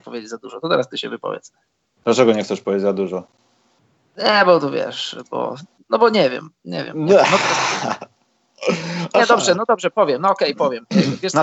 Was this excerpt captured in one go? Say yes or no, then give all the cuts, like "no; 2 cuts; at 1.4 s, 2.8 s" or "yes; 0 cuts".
yes; 0 cuts